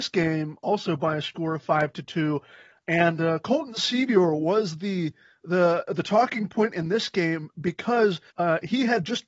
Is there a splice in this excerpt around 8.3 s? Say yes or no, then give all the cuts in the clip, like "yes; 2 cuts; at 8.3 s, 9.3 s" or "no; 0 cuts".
yes; 1 cut; at 8.3 s